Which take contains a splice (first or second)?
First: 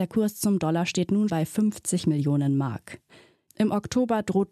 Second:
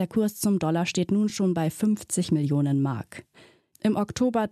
first